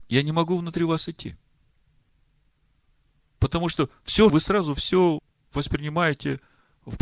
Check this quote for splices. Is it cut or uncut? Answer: cut